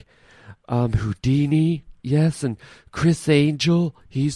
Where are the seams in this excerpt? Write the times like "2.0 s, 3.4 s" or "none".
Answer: 2.0 s